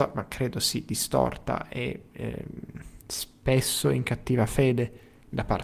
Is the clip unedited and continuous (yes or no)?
no